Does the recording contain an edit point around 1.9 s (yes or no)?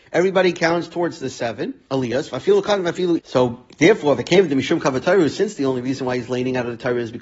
yes